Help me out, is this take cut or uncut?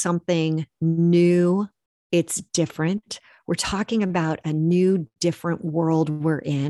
uncut